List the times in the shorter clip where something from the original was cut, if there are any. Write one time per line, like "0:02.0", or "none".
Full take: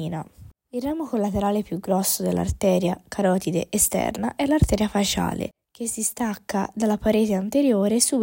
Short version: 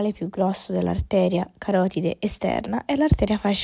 none